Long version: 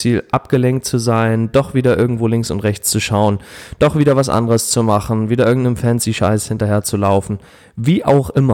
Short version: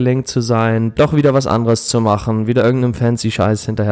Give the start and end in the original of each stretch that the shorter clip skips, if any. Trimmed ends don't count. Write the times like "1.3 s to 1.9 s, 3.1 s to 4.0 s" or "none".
1.5 s to 3.8 s

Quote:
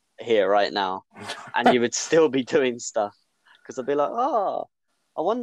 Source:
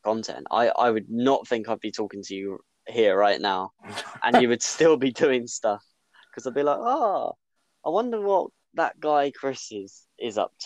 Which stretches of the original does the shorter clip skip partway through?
none

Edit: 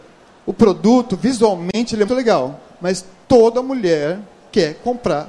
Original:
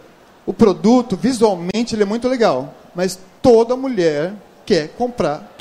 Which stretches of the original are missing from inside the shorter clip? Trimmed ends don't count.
2.1 s to 2.2 s

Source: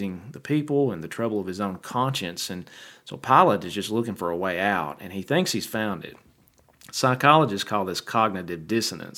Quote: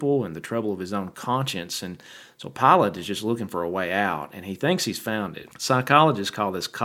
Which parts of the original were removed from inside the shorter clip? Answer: 6.2 s to 6.8 s

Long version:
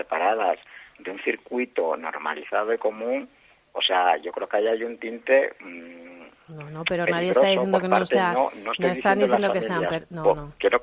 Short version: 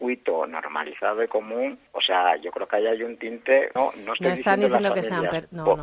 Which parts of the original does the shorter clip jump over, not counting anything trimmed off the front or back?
3.4 s to 3.7 s, 5.6 s to 8.3 s

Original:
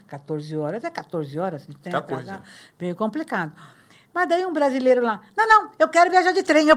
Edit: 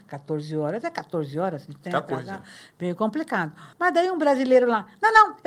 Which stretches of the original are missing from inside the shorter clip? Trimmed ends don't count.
3.7 s to 4.1 s

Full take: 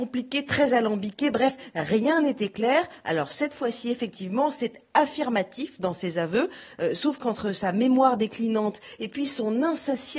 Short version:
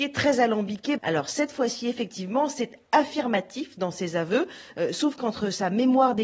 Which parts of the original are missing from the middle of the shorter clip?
1.3 s to 3.0 s

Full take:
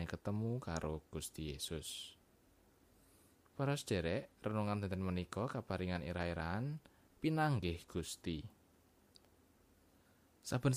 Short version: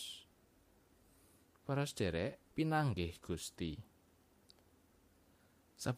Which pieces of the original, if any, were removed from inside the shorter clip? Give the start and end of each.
4.3 s to 7.1 s

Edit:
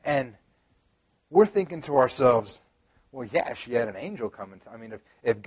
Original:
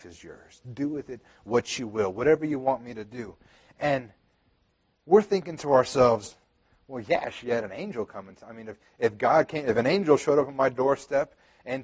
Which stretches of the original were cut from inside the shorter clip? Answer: none

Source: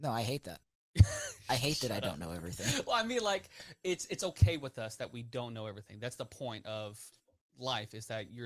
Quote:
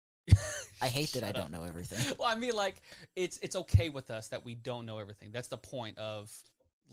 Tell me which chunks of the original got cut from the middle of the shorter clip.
none

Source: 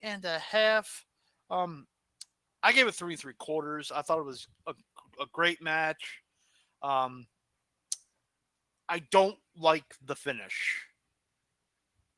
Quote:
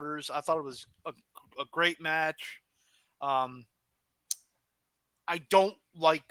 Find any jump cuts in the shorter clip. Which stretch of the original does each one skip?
none

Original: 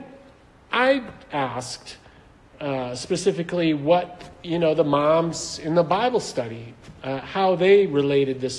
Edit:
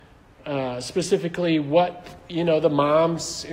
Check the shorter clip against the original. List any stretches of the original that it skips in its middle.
none

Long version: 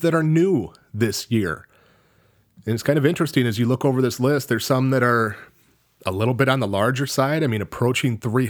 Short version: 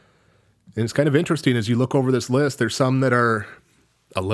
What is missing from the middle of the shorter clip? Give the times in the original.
none

